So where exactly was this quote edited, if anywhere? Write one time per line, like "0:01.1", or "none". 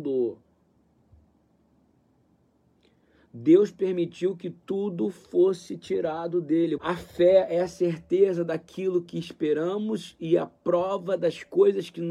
0:06.8